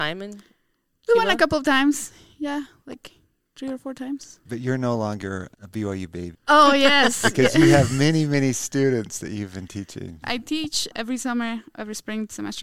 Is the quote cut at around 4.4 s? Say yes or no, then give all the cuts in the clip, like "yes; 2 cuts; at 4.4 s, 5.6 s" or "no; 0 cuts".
no; 2 cuts; at 6.3 s, 10.2 s